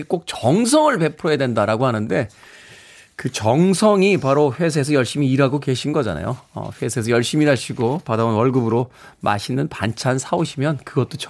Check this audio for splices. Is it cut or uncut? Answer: uncut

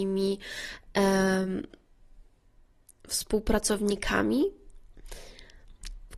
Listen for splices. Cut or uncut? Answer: uncut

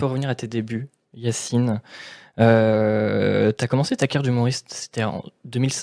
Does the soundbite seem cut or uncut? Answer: uncut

